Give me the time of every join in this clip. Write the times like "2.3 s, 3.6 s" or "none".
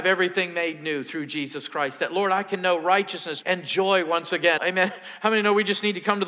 3.4 s, 4.6 s